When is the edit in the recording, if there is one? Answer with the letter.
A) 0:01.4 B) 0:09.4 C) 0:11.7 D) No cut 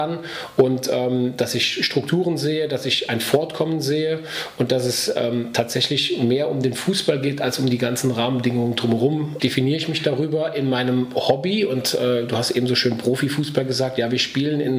B